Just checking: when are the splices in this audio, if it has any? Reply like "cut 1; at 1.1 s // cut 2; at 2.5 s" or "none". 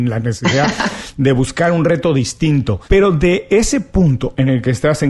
cut 1; at 2.9 s